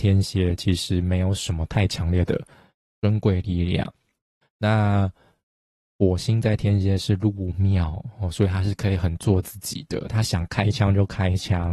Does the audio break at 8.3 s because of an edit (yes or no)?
no